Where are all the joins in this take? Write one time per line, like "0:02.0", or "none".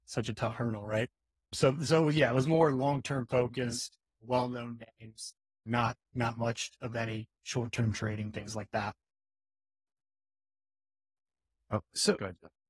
none